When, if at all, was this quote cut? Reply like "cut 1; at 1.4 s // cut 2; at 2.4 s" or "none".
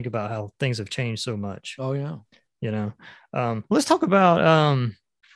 cut 1; at 3.6 s